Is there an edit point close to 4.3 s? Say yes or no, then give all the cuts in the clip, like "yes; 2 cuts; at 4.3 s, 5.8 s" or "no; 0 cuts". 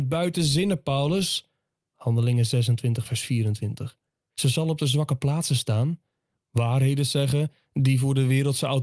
yes; 1 cut; at 4.3 s